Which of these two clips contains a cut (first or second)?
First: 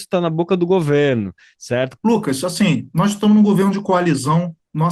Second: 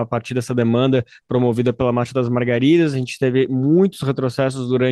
first